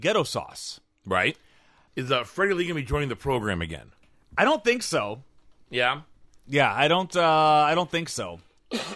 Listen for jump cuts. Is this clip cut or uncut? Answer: cut